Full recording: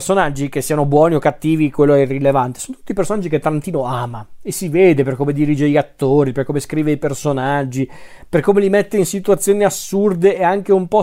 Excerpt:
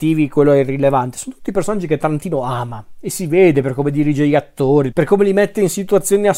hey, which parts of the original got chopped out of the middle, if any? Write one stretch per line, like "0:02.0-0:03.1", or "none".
0:06.3-0:08.3

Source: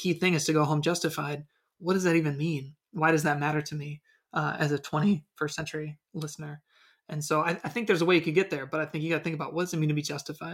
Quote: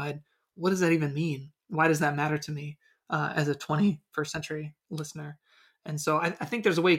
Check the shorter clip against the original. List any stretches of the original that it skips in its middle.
none

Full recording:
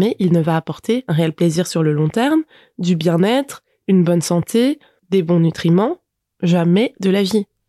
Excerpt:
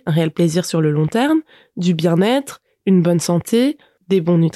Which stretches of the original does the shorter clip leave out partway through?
none

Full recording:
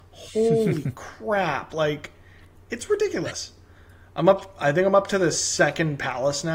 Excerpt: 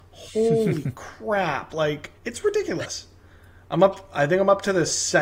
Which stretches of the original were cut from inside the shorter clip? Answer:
0:02.2-0:02.6

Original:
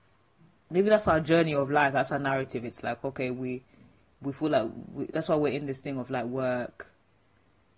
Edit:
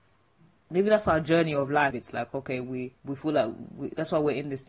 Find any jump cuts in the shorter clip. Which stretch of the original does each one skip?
0:01.9-0:02.6
0:03.7-0:04.2

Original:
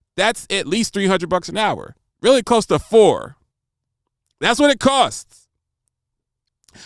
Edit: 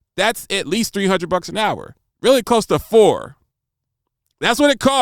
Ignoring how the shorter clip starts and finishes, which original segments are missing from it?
none

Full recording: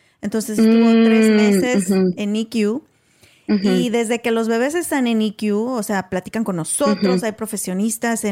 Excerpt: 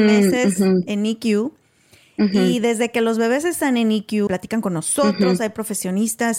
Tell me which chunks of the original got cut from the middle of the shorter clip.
0:05.6-0:06.1

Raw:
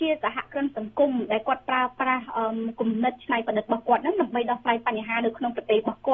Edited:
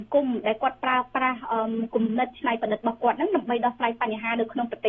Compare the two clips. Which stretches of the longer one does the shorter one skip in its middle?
none

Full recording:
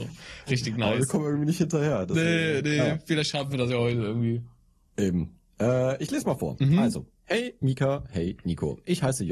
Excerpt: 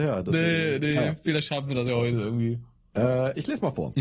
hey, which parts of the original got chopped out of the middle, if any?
0:04.7-0:05.5

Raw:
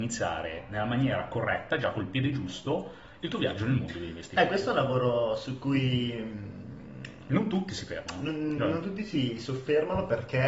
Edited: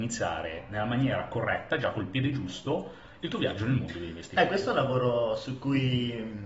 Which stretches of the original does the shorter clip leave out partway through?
none

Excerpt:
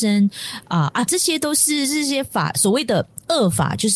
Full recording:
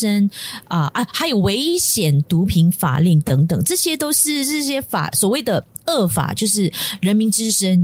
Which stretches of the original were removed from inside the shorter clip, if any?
0:01.1-0:03.6

